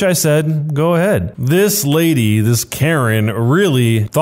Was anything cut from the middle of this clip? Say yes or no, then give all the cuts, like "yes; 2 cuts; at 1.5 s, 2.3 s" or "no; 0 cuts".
yes; 1 cut; at 1.3 s